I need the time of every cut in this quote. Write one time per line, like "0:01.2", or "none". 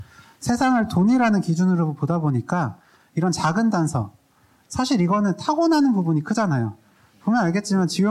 0:04.6